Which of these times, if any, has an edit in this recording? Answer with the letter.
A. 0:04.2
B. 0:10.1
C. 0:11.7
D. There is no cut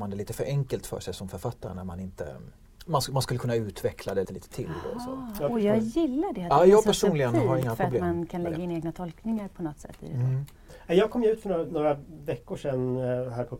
A